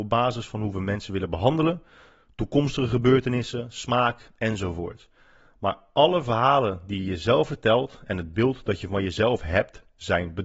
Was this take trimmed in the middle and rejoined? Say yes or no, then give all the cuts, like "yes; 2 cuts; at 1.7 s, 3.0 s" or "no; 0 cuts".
no; 0 cuts